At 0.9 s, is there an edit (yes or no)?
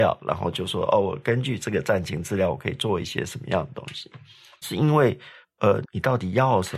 no